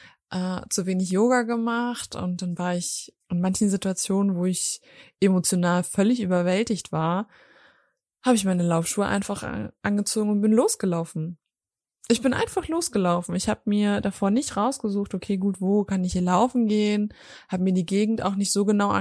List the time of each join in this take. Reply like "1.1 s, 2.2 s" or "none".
3.2 s